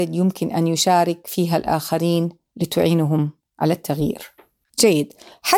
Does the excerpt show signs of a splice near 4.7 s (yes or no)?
yes